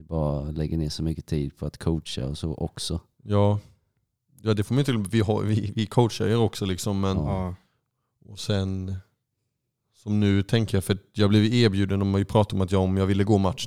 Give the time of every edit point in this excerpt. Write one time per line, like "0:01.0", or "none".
none